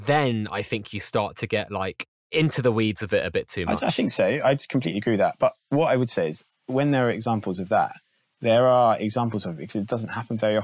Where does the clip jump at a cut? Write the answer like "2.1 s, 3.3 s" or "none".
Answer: none

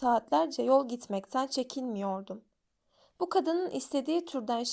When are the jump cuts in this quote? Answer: none

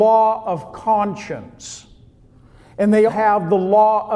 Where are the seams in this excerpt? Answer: 3.1 s

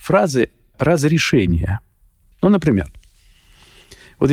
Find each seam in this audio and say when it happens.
2.3 s

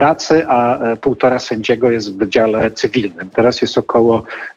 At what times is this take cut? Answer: 3.3 s

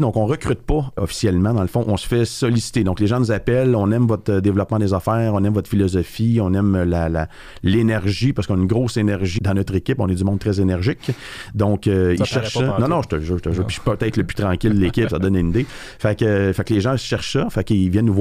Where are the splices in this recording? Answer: 1.0 s, 9.4 s

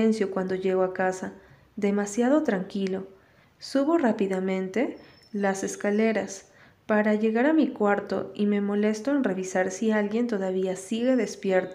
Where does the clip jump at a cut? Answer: 3.4 s

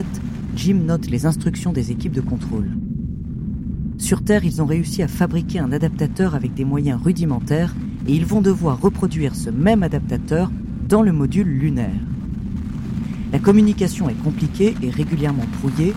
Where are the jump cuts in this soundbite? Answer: none

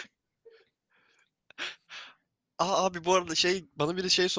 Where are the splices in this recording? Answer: 1.4 s

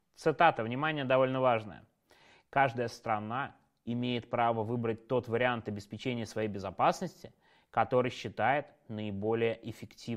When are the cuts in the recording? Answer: none

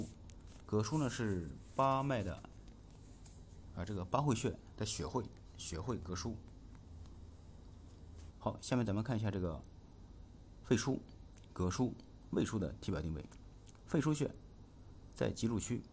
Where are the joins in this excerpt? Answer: 8.3 s

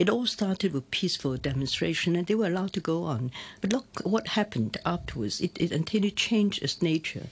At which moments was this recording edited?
none

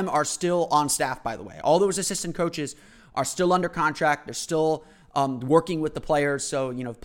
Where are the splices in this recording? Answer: none

